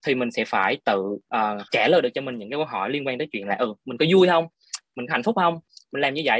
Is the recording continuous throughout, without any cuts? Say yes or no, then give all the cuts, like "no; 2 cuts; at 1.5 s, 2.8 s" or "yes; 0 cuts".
no; 1 cut; at 1.7 s